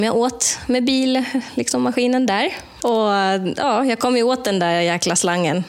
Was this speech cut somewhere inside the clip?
no; 0 cuts

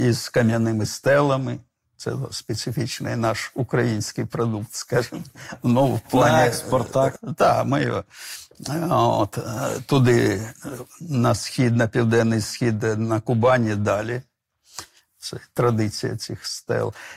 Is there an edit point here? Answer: yes; 2 cuts; at 7.2 s, 15.1 s

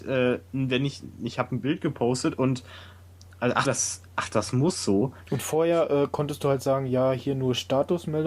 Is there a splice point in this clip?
yes; 2 cuts; at 3.6 s, 5.2 s

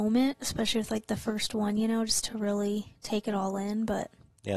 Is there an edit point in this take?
no; 0 cuts

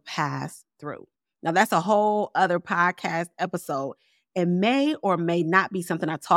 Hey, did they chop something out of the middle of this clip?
no; 0 cuts

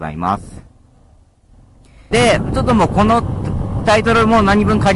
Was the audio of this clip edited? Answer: yes; 1 cut; at 2.1 s

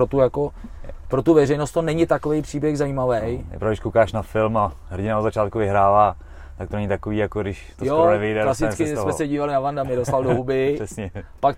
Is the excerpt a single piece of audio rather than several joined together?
yes; 0 cuts

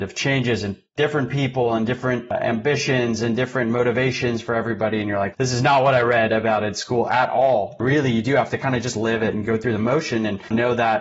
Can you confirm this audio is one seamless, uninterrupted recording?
no; 1 cut; at 5.3 s

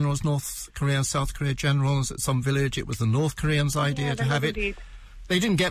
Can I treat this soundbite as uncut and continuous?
yes; 0 cuts

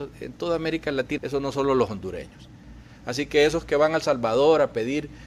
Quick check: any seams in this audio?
yes; 1 cut; at 1.2 s

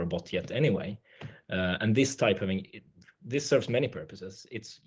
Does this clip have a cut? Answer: no; 0 cuts

